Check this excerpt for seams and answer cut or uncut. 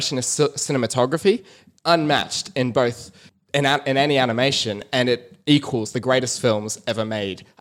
uncut